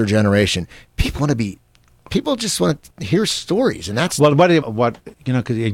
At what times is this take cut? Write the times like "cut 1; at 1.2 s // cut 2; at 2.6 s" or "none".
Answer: cut 1; at 1.2 s // cut 2; at 4.6 s

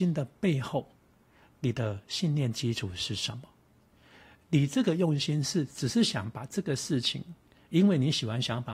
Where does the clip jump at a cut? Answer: none

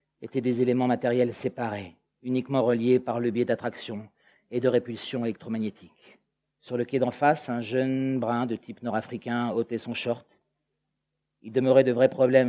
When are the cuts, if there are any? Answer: cut 1; at 6.5 s

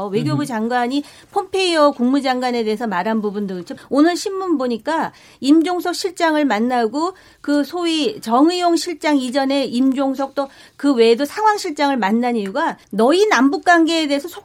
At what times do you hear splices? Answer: cut 1; at 3.8 s // cut 2; at 12.8 s

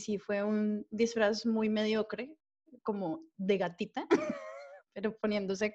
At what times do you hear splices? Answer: none

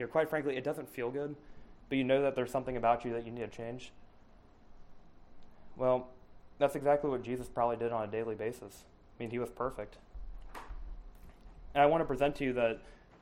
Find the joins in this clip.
none

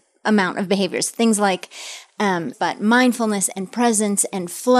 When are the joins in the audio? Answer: cut 1; at 2.5 s

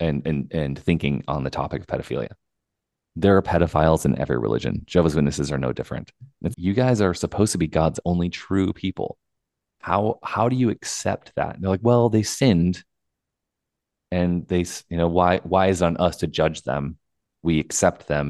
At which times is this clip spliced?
cut 1; at 6.5 s

